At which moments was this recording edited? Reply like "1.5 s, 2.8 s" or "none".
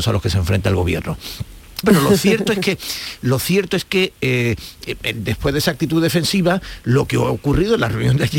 1.8 s